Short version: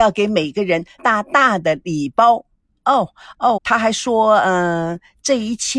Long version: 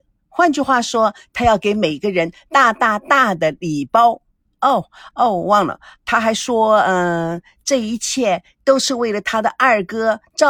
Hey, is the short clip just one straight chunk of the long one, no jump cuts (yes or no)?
no